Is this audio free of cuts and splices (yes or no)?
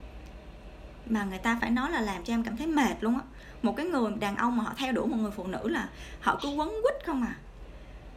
no